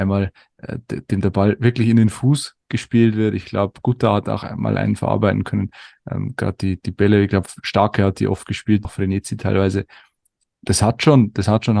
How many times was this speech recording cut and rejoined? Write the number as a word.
one